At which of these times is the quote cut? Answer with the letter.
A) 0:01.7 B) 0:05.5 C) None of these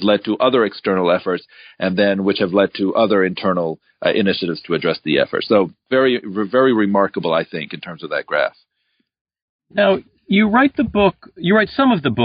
C